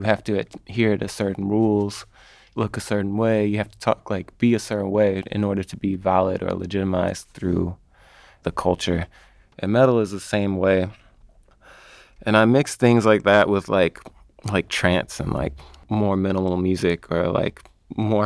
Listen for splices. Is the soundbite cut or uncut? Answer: uncut